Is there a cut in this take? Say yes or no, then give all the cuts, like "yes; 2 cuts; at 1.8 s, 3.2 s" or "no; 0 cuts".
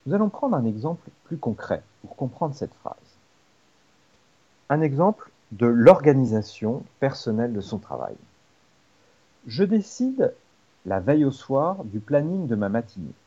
no; 0 cuts